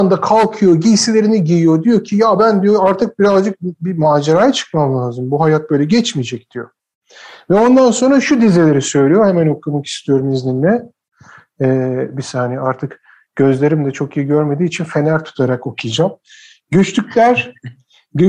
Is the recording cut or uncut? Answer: uncut